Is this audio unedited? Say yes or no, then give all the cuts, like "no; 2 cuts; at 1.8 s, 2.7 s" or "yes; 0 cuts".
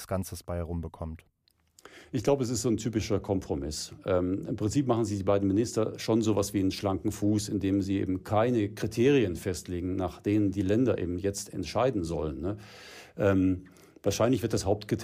yes; 0 cuts